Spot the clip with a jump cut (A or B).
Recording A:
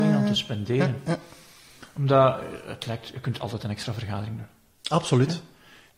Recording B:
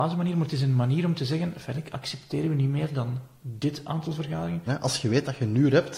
B